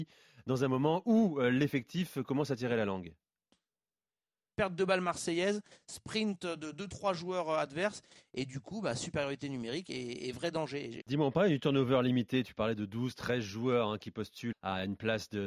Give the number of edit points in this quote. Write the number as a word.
three